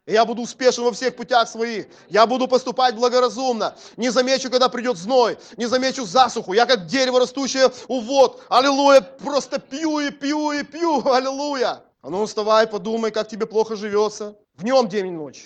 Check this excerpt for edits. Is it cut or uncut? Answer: cut